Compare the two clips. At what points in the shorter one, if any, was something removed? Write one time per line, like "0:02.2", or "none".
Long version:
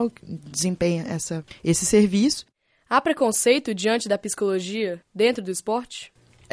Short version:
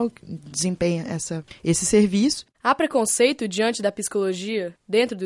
0:02.5